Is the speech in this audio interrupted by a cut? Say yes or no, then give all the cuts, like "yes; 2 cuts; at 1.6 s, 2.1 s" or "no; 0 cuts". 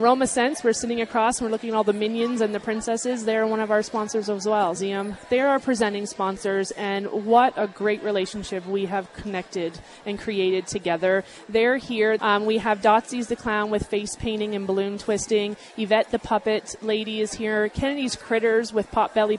yes; 2 cuts; at 4.8 s, 12.2 s